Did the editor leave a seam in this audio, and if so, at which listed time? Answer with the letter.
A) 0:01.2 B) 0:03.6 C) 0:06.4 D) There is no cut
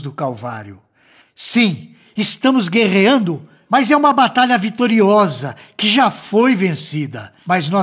A